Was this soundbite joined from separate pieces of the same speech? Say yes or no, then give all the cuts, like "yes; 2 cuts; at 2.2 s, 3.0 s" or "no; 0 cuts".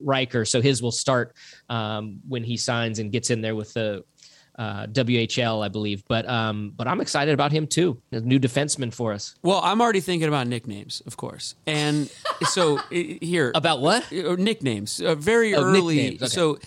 yes; 1 cut; at 8.1 s